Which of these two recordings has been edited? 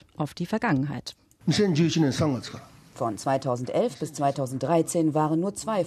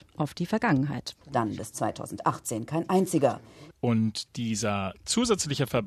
second; 2 cuts; at 1.2 s, 3.7 s

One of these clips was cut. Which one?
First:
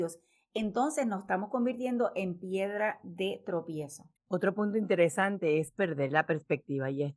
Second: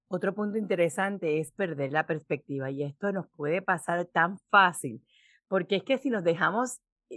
first; 1 cut; at 4.2 s

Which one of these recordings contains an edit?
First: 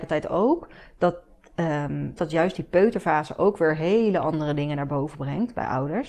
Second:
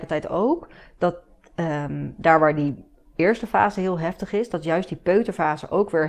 first; 1 cut; at 2.2 s

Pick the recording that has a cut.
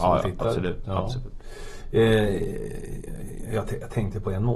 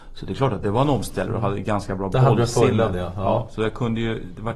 second; 1 cut; at 1.3 s

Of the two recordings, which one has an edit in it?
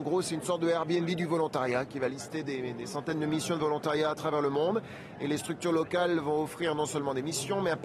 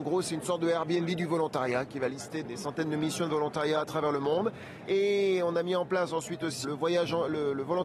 second; 3 cuts; at 2.4 s, 4.9 s, 6.6 s

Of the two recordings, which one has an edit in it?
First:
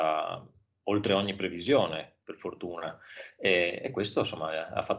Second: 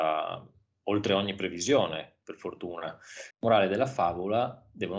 second; 1 cut; at 3.3 s

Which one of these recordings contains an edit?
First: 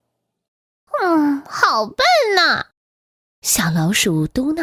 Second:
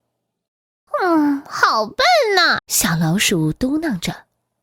second; 1 cut; at 2.6 s

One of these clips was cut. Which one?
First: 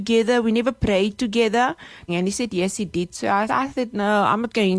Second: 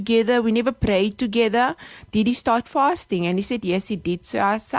first; 2 cuts; at 2.1 s, 3.5 s

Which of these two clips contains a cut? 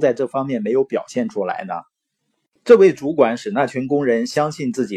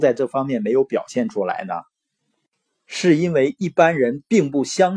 first; 1 cut; at 2.6 s

